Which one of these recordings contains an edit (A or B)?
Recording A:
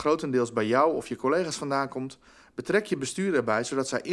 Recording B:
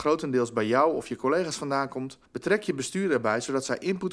B